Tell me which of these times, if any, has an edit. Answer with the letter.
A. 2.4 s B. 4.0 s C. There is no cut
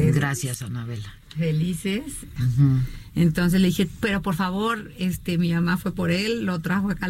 A